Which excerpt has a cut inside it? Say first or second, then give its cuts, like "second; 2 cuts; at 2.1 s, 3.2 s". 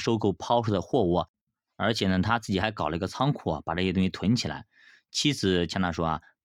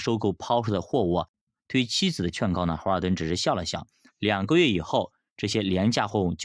second; 2 cuts; at 1.6 s, 4.1 s